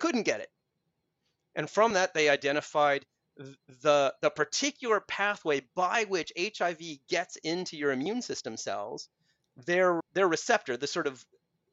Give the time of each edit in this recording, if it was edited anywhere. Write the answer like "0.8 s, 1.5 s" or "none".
10.0 s

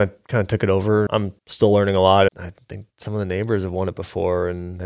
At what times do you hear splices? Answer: 1.1 s, 2.3 s

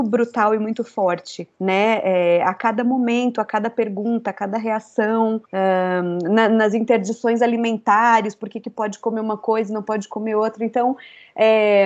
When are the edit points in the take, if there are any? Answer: 1.5 s, 5.4 s

